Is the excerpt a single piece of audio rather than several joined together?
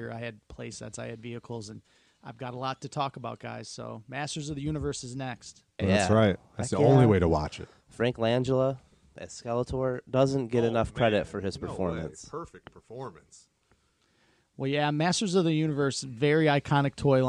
no; 1 cut; at 5.8 s

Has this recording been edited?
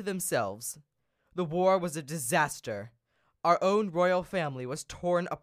no; 0 cuts

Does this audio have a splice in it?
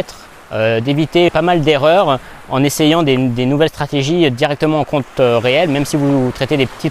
yes; 1 cut; at 1.3 s

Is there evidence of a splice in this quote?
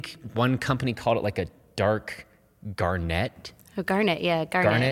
no; 0 cuts

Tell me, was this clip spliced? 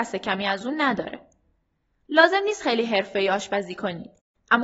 no; 0 cuts

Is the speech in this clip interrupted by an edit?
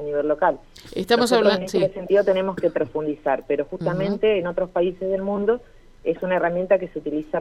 no; 0 cuts

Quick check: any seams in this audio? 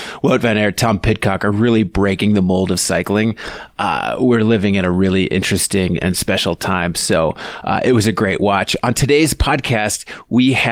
no; 0 cuts

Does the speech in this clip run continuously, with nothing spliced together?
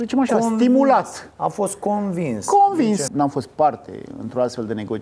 no; 1 cut; at 3.1 s

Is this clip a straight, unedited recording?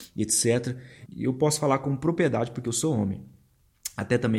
no; 1 cut; at 1.1 s

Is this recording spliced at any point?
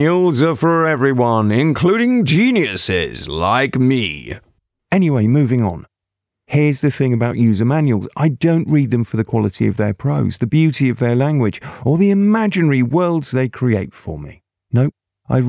no; 0 cuts

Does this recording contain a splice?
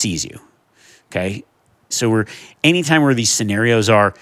yes; 1 cut; at 1.9 s

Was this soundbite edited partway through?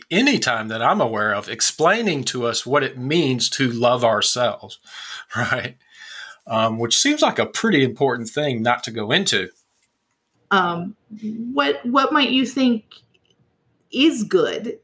yes; 1 cut; at 10.3 s

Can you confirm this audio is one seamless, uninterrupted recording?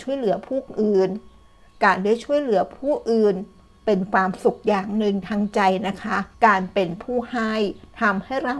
no; 1 cut; at 6.3 s

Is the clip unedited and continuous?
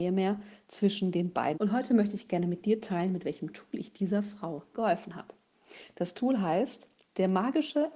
no; 1 cut; at 1.5 s

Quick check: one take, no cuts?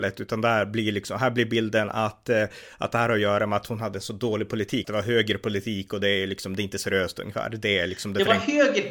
no; 1 cut; at 4.8 s

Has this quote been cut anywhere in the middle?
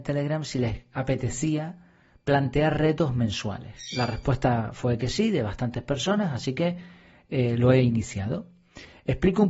no; 0 cuts

